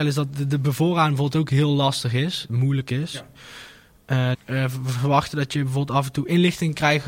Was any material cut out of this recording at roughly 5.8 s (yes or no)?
no